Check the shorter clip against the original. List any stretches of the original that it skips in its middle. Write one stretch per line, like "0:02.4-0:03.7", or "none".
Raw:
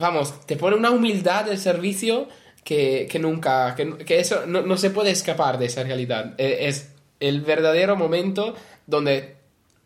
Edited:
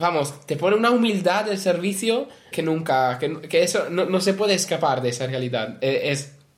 0:02.5-0:03.1

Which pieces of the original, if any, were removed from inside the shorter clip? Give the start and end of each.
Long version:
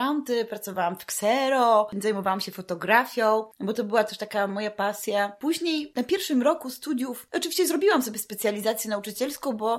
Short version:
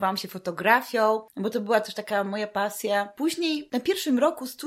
none

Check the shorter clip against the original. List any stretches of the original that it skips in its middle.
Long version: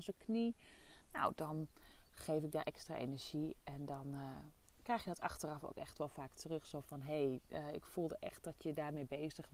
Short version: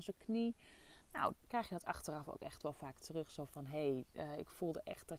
0:01.3-0:04.7

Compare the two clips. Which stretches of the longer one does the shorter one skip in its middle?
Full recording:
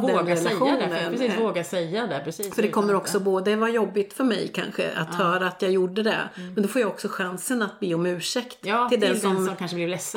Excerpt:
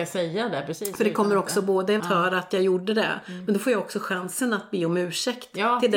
0:03.6-0:05.1

